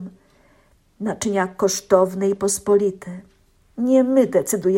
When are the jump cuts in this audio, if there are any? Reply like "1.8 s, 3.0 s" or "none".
3.6 s